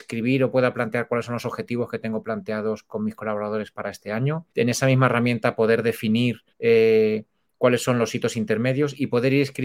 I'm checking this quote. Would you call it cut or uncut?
cut